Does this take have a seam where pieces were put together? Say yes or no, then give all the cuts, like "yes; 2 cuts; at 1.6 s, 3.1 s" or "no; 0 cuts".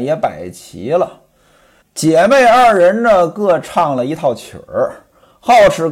yes; 1 cut; at 1.8 s